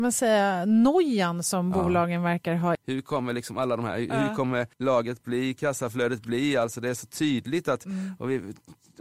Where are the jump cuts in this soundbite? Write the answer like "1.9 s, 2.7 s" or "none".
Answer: 2.7 s, 4.7 s